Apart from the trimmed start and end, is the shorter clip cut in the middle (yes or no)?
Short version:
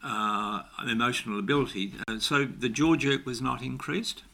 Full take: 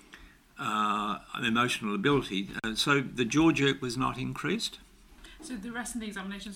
no